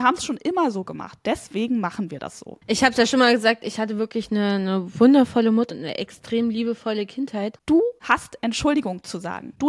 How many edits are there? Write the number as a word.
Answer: two